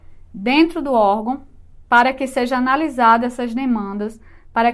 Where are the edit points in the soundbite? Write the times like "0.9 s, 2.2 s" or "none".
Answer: 1.8 s